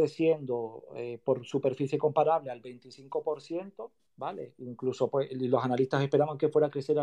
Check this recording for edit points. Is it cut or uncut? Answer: uncut